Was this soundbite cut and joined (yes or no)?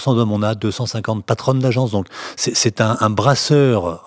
no